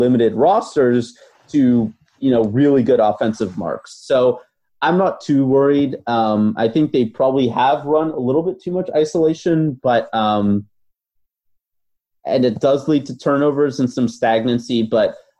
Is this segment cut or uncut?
uncut